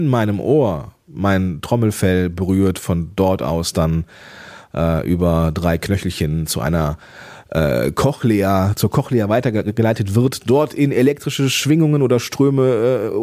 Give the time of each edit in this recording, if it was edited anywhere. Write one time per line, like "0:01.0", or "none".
none

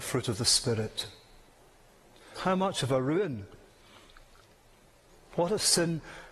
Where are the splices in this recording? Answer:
0:02.4

